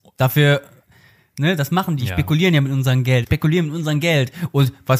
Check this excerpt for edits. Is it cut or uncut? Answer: cut